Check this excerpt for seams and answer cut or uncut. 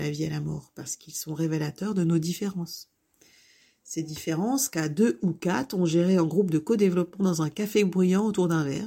uncut